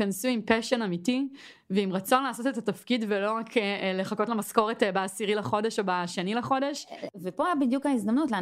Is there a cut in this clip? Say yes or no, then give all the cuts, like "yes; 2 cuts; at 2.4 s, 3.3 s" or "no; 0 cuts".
no; 0 cuts